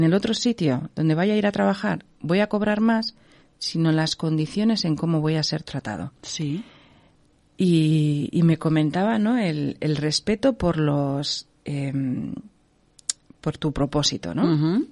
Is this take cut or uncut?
cut